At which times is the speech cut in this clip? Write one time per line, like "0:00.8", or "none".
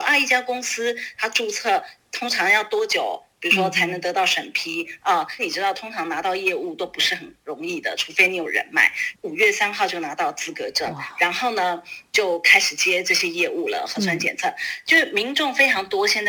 0:05.4
0:09.1